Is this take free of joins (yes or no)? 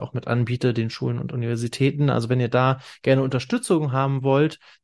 yes